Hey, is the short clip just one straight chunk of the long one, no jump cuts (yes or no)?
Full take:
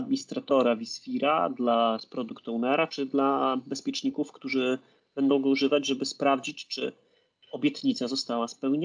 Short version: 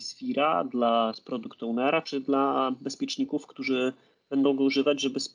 yes